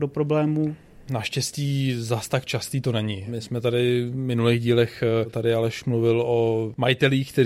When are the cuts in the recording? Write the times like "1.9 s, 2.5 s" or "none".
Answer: 1.1 s